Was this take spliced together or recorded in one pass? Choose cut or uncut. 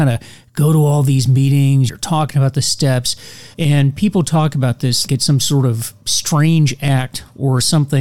cut